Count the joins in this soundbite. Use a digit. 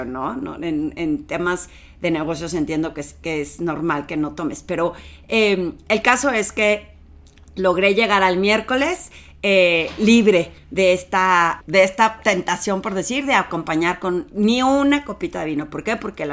1